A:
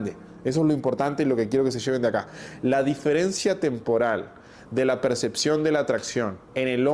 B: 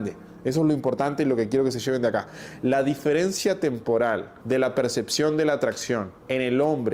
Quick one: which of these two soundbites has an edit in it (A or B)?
B